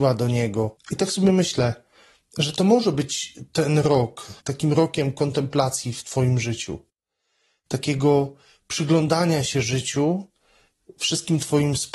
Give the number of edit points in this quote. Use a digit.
1